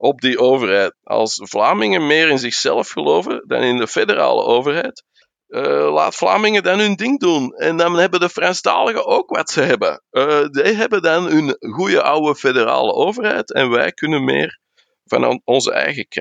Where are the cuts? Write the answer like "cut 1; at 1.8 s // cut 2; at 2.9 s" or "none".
cut 1; at 0.9 s